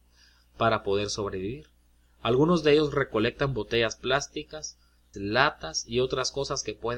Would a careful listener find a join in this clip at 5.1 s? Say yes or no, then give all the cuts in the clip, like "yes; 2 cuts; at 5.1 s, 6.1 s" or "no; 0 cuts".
yes; 1 cut; at 5.1 s